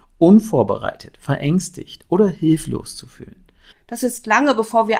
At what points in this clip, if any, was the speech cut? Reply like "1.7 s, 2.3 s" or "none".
3.7 s